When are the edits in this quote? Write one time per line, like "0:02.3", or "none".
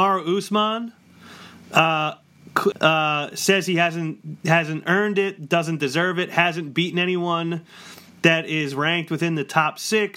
0:02.7